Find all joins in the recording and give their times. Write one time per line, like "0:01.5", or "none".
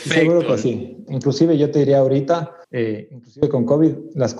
0:01.1
0:02.6